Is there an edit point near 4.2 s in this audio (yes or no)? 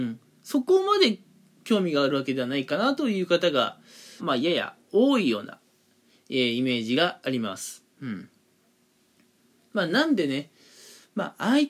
yes